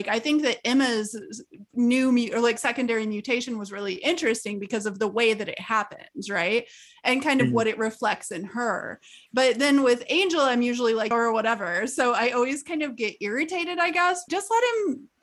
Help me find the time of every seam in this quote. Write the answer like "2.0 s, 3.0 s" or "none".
11.1 s, 14.3 s